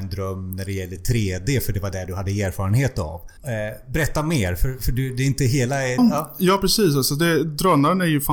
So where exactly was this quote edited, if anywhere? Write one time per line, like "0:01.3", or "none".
0:03.4
0:06.0